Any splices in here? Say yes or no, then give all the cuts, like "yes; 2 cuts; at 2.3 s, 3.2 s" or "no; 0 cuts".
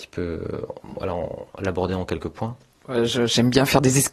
yes; 1 cut; at 1.5 s